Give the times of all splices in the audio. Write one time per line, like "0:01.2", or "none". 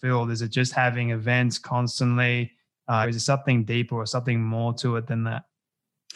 0:03.0